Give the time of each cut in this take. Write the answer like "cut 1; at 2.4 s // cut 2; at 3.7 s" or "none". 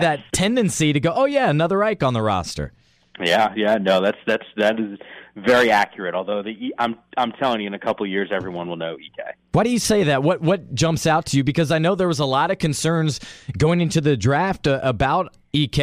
none